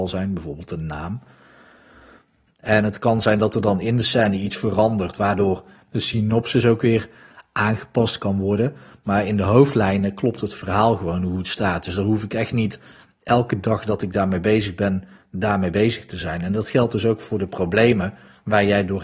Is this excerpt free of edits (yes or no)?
no